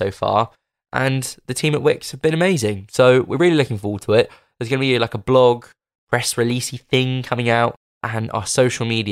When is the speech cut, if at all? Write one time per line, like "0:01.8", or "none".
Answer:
none